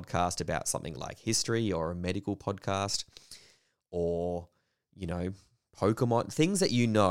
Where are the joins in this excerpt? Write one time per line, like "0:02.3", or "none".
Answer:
none